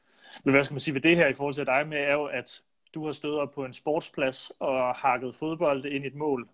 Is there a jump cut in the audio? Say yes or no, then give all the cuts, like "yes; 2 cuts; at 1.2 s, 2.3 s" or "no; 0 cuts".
no; 0 cuts